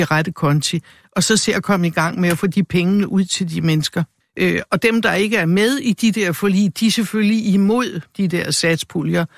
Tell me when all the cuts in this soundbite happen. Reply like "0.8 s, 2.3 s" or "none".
4.2 s